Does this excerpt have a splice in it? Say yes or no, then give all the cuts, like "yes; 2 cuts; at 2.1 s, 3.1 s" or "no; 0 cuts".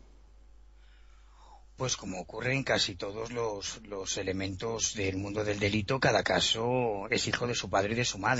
no; 0 cuts